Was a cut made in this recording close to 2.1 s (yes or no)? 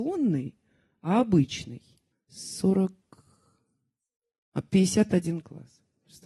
yes